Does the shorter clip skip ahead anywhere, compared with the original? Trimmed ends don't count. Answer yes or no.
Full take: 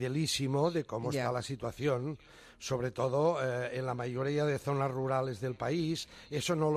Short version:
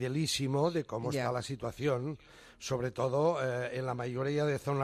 no